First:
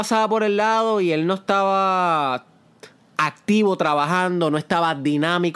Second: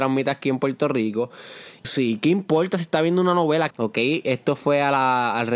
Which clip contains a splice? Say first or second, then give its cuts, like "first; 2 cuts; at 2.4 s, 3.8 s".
second; 2 cuts; at 1.8 s, 3.7 s